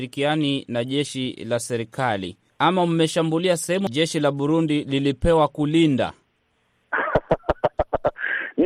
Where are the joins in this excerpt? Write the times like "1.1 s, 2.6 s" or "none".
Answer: none